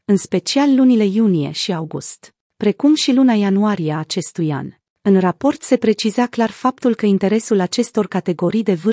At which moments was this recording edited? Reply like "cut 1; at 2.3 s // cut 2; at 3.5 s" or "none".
cut 1; at 4.9 s